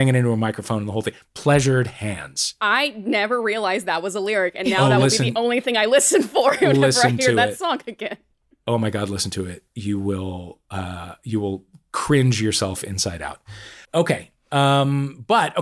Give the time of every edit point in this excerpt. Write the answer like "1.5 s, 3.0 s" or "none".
13.8 s